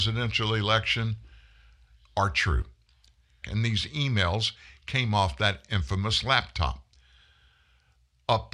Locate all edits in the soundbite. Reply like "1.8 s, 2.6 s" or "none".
3.4 s